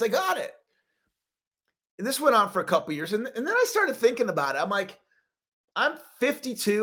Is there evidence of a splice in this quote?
no; 0 cuts

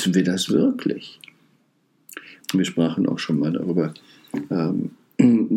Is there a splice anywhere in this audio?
yes; 1 cut; at 2.4 s

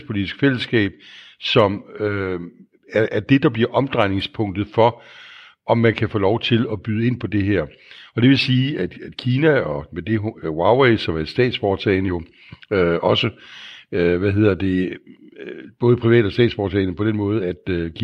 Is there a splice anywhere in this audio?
no; 0 cuts

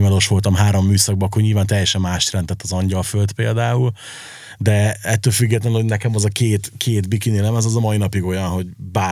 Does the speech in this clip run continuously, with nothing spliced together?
yes; 0 cuts

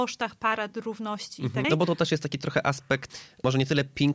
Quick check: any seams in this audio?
yes; 1 cut; at 1.6 s

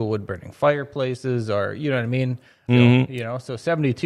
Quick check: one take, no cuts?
no; 1 cut; at 2.7 s

